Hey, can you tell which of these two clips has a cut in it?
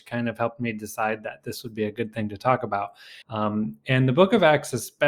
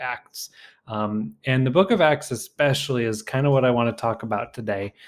first; 1 cut; at 3.2 s

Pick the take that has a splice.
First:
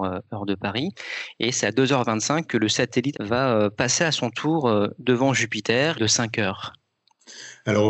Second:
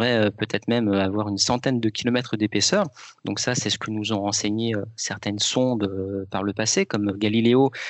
first; 2 cuts; at 3.1 s, 5.9 s

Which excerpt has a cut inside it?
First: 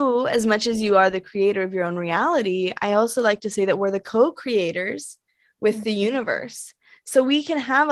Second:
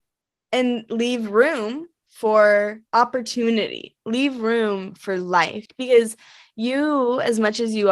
second; 1 cut; at 2.9 s

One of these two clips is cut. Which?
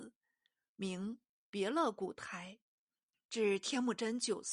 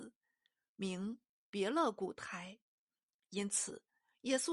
first; 1 cut; at 3.1 s

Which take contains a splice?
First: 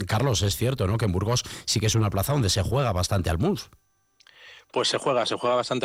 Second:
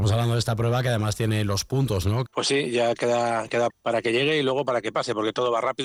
second; 2 cuts; at 2.3 s, 3.7 s

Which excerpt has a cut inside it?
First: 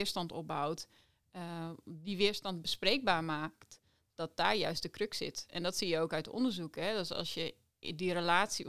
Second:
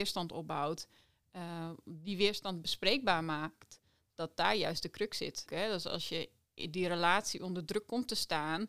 second; 1 cut; at 5.5 s

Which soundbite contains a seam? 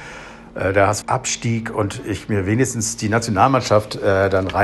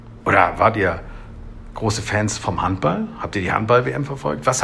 first; 1 cut; at 1.0 s

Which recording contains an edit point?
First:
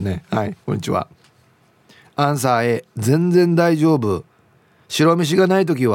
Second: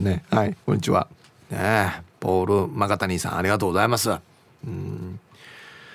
second; 1 cut; at 1.4 s

